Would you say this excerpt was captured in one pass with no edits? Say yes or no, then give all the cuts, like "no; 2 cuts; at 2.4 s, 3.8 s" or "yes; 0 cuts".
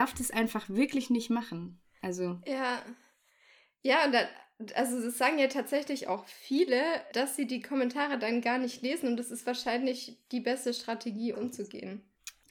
no; 2 cuts; at 7.1 s, 11.3 s